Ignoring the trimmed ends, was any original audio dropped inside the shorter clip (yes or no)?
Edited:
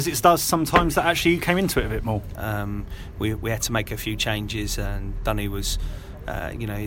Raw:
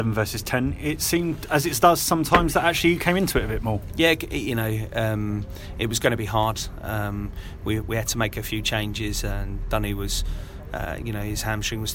yes